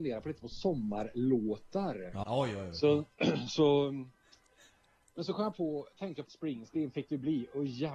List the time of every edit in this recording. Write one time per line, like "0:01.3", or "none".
0:02.2
0:06.3